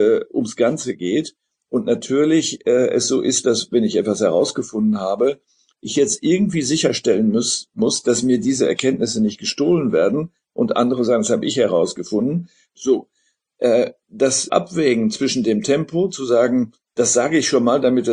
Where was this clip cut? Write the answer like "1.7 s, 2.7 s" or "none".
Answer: 12.8 s, 14.5 s